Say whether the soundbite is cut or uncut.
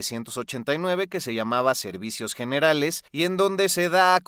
cut